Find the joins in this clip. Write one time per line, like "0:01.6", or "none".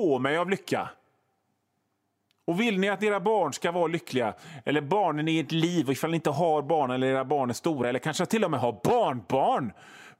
none